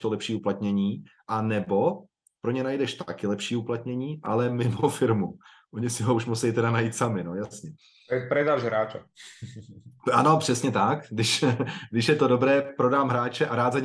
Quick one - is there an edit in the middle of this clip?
no; 0 cuts

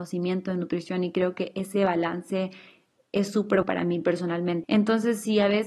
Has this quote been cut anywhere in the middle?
yes; 2 cuts; at 3.6 s, 4.6 s

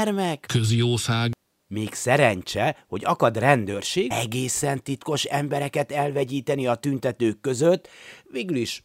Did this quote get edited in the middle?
yes; 1 cut; at 4.1 s

